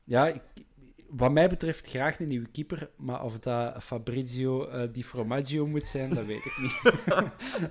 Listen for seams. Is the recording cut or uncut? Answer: cut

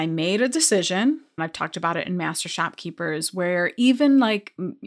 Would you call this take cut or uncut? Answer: cut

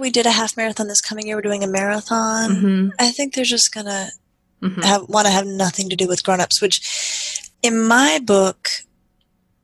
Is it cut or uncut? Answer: cut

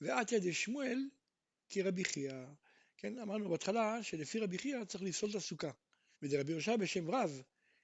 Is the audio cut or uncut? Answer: cut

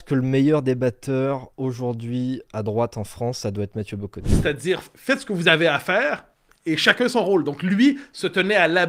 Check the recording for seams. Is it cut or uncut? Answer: uncut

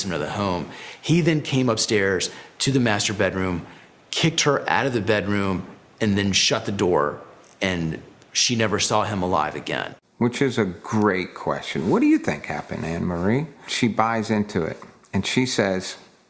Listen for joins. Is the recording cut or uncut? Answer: cut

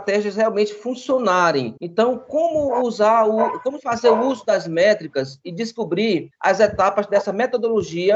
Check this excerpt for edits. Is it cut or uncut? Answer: uncut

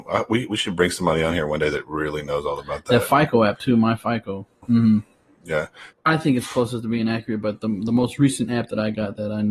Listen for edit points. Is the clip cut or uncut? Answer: cut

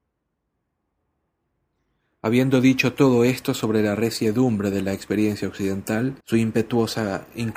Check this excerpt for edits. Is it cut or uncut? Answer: cut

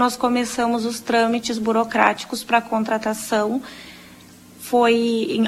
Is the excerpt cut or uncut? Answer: uncut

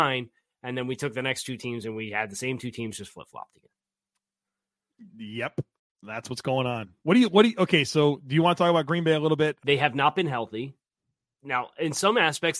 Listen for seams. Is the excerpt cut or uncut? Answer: cut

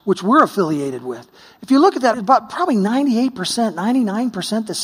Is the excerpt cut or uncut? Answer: cut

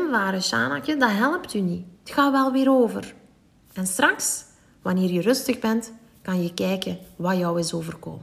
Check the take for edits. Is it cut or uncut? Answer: uncut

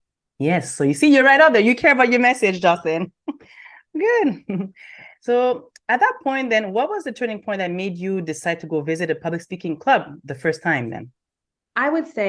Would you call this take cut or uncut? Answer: uncut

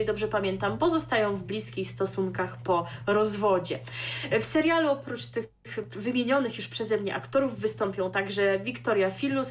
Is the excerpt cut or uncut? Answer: uncut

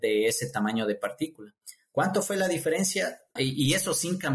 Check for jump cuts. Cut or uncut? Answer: cut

